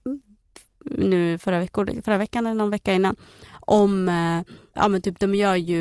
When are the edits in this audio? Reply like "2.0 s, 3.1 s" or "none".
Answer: 4.7 s